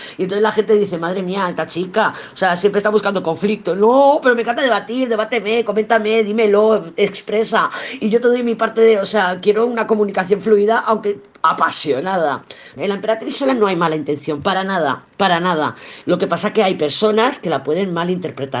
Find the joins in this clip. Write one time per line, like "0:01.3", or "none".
0:12.8
0:16.0